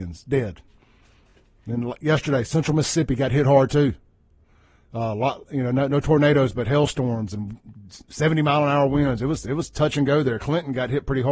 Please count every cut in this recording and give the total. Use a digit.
0